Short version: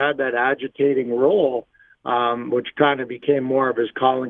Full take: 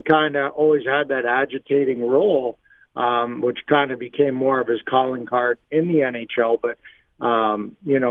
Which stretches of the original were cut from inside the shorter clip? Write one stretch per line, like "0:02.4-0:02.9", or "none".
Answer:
none